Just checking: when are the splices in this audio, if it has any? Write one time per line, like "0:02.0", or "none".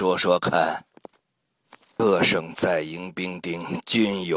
0:02.0